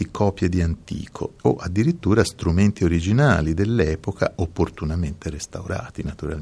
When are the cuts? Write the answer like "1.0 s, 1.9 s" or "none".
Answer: 1.4 s